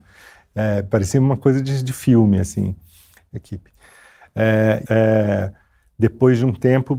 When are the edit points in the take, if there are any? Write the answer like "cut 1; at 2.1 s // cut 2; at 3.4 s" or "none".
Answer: cut 1; at 3.3 s // cut 2; at 4.8 s